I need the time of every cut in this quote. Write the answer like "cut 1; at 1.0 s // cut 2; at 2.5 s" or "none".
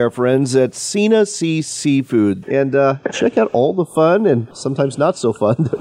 cut 1; at 2.4 s // cut 2; at 4.5 s

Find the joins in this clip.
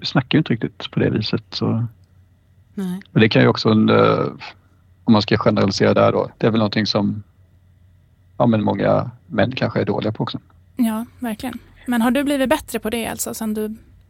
none

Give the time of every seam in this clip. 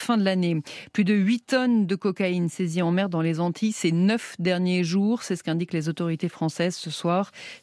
none

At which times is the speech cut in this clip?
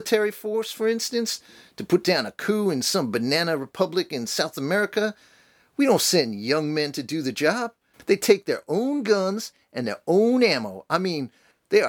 cut 1; at 7.9 s

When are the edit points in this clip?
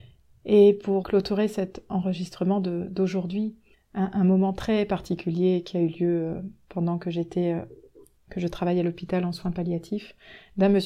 cut 1; at 1.0 s // cut 2; at 3.7 s

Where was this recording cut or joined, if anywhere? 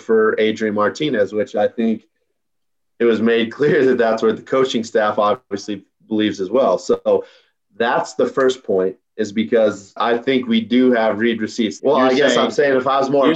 cut 1; at 10.0 s // cut 2; at 11.8 s

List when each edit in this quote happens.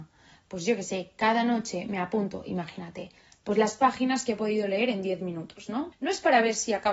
cut 1; at 5.9 s

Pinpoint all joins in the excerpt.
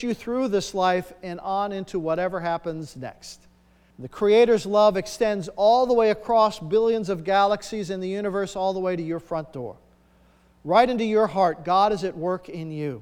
cut 1; at 3.9 s

